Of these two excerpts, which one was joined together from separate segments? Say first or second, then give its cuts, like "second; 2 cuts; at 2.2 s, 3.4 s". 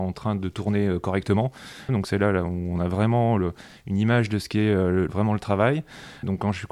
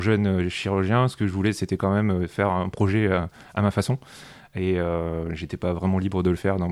first; 2 cuts; at 1.9 s, 5.1 s